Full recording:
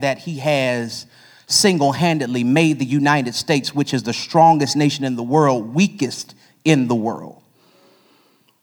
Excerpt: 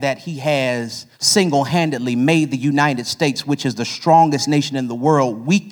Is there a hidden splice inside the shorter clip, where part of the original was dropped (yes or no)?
yes